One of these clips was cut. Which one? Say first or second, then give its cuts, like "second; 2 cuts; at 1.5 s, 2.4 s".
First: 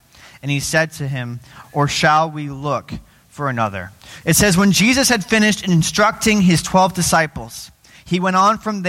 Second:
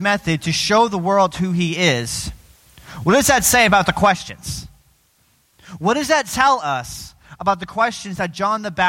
first; 2 cuts; at 1.6 s, 4.2 s